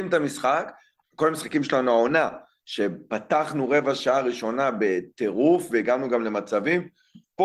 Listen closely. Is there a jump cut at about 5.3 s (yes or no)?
no